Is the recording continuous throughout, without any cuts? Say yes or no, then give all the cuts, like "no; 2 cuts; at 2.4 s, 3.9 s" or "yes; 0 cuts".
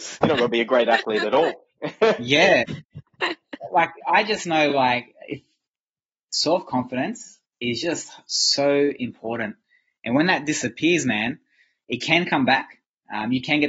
yes; 0 cuts